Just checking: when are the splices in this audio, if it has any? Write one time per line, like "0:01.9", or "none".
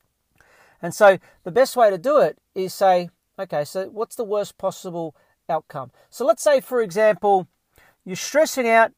none